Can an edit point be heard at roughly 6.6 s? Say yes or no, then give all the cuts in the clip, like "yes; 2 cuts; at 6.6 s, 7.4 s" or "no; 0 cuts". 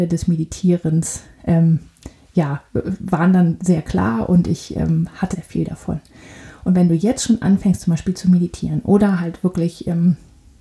no; 1 cut; at 5.3 s